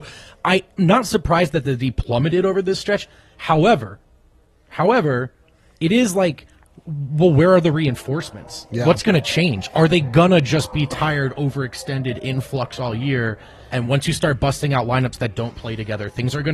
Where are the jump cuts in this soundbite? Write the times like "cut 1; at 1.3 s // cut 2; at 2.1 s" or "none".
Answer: cut 1; at 8.7 s // cut 2; at 13.7 s